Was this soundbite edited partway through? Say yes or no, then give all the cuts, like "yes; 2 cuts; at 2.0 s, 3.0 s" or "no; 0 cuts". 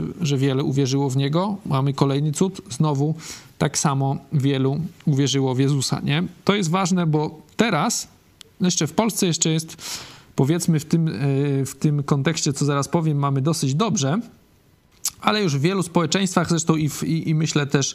no; 0 cuts